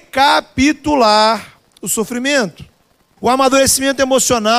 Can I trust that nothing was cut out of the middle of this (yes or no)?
no